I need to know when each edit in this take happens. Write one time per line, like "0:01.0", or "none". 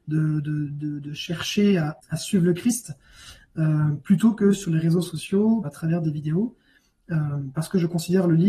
0:05.6